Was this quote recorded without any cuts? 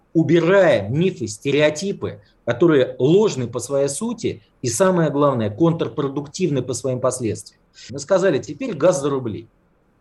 no; 1 cut; at 7.9 s

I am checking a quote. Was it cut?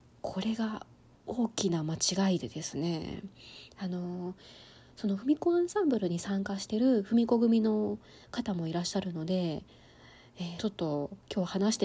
yes; 1 cut; at 10.6 s

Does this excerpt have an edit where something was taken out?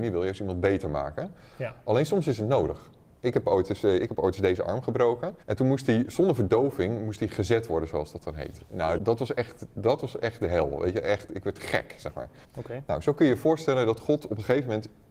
yes; 3 cuts; at 5.4 s, 9.0 s, 12.5 s

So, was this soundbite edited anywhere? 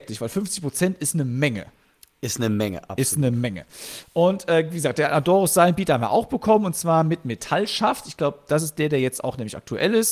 no; 0 cuts

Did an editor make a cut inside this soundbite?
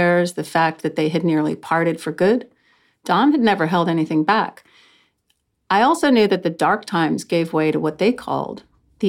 no; 0 cuts

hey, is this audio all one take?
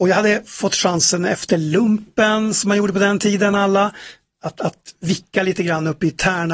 yes; 0 cuts

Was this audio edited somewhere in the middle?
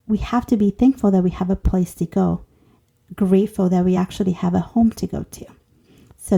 no; 0 cuts

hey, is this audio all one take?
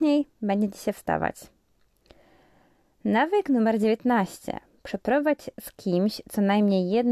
yes; 0 cuts

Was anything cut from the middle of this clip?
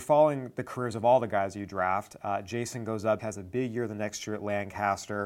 yes; 1 cut; at 3.2 s

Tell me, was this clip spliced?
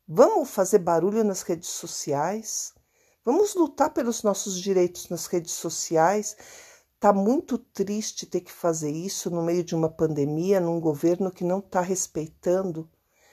no; 0 cuts

